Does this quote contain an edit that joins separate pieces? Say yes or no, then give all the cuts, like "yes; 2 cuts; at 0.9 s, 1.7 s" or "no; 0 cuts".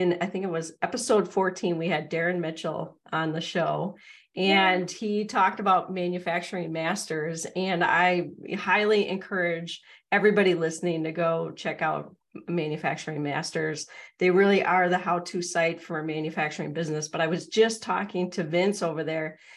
no; 0 cuts